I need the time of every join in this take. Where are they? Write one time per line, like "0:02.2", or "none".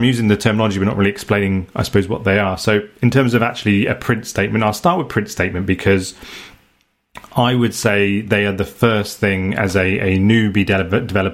none